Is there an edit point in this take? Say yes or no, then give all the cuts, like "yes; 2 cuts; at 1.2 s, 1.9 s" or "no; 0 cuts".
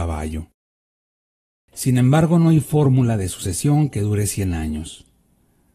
yes; 1 cut; at 1.6 s